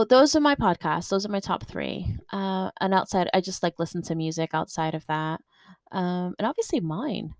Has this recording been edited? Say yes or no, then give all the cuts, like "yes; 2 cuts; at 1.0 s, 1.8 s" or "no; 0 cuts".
no; 0 cuts